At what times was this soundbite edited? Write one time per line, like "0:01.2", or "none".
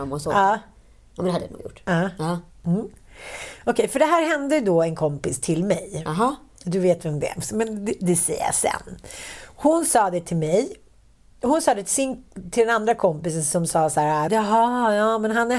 0:14.3